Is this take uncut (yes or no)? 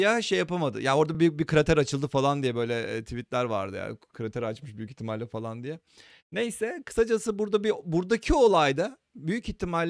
yes